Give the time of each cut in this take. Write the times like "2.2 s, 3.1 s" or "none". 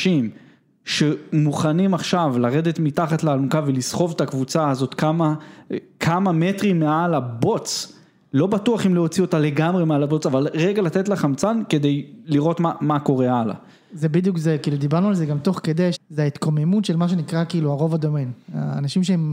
15.9 s